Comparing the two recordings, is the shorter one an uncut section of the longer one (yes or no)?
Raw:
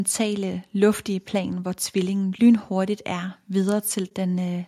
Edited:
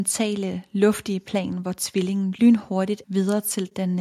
no